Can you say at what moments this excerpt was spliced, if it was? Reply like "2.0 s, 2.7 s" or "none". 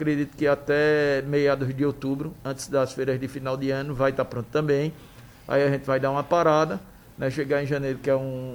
none